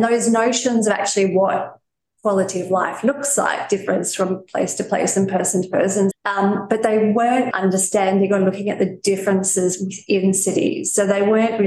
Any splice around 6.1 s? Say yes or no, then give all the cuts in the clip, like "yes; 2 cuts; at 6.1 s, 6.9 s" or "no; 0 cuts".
yes; 2 cuts; at 6.1 s, 7.5 s